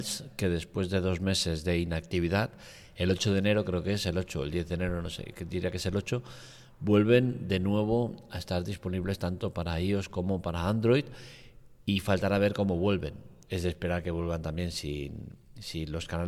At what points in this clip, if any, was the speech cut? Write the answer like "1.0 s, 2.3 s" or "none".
none

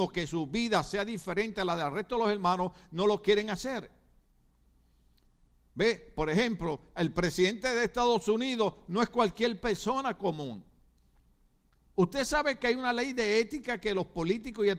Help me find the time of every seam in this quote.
none

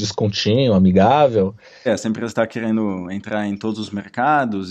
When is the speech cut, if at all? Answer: 1.9 s

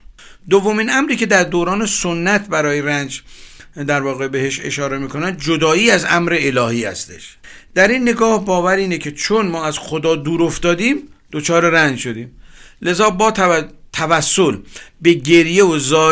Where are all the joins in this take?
none

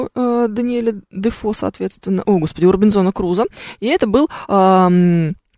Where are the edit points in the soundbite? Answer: none

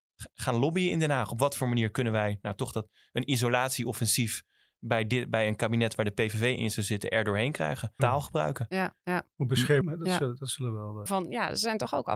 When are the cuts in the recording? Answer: 8.0 s, 9.8 s, 11.1 s

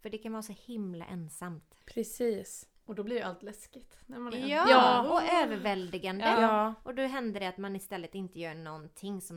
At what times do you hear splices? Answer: 1.8 s

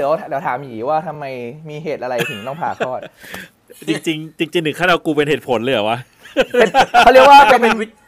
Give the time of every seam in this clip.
none

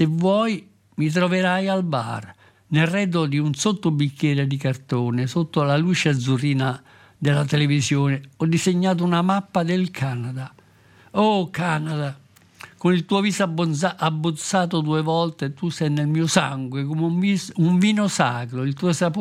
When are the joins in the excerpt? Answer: none

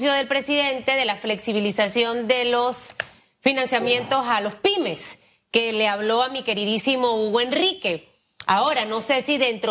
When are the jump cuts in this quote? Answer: none

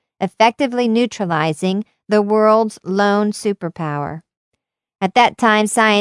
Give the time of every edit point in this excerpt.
none

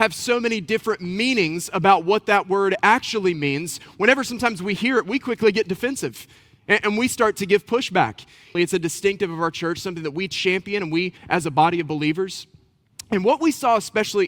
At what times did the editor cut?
8.5 s, 11.2 s

